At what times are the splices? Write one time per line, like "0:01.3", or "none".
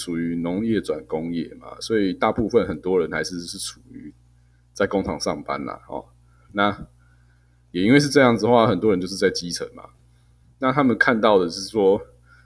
none